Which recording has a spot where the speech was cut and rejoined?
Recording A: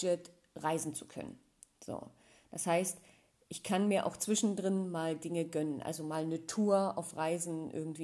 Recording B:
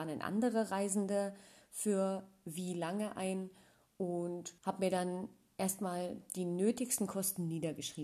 B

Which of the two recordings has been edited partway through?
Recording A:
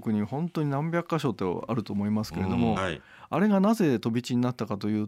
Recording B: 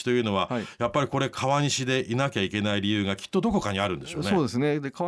A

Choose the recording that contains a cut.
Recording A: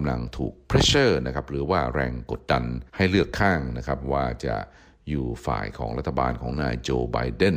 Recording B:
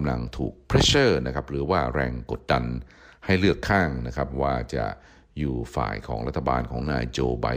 A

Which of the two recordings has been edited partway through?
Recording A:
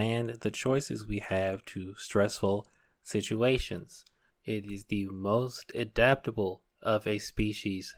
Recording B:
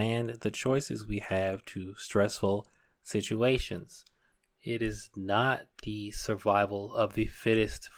A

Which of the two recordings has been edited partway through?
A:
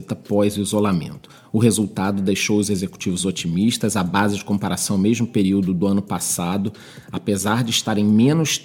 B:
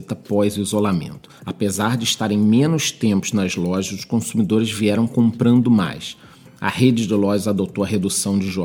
B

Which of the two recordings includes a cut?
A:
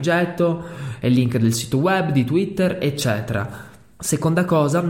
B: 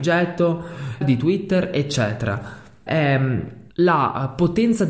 B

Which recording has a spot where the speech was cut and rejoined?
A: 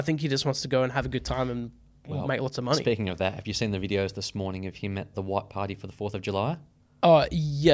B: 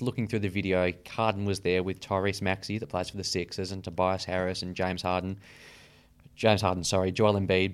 A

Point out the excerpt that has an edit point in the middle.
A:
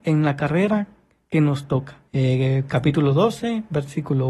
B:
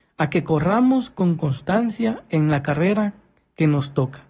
A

